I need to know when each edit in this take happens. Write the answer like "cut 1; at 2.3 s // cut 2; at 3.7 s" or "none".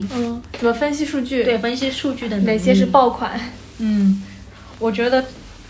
cut 1; at 4.8 s